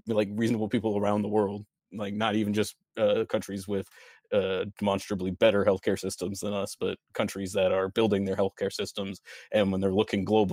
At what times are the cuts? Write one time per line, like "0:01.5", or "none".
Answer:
none

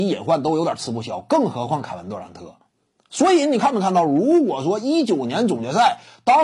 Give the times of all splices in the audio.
none

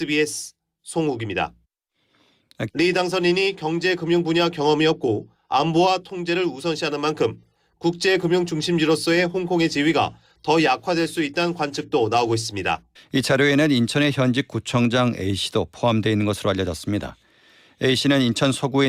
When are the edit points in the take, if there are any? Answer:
0:02.7
0:13.0

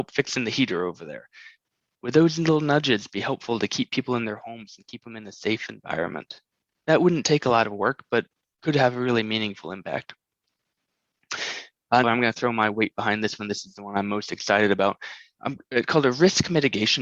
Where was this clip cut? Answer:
0:12.0

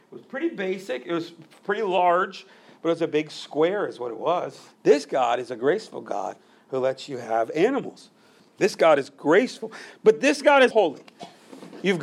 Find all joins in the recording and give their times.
0:04.7
0:08.4
0:10.7

